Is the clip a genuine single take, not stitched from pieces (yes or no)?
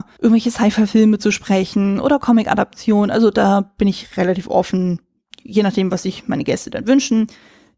yes